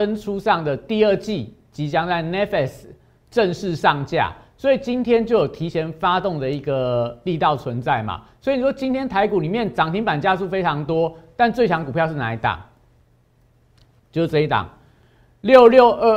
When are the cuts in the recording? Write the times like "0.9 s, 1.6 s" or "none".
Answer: none